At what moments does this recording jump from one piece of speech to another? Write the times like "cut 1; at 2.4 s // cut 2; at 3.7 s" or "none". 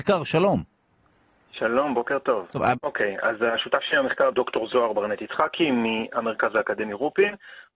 cut 1; at 2.8 s // cut 2; at 4.3 s

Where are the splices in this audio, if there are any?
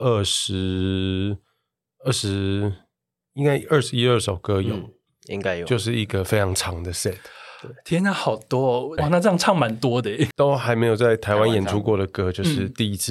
cut 1; at 9.0 s // cut 2; at 10.3 s

